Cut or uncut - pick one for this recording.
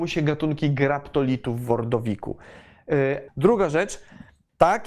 cut